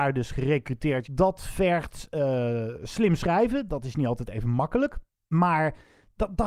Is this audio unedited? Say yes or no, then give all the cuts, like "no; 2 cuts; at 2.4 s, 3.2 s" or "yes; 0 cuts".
no; 1 cut; at 1.0 s